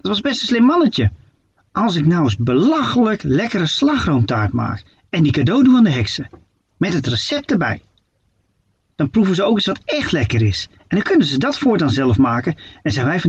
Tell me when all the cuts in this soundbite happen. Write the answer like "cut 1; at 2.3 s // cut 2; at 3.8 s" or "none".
cut 1; at 1.6 s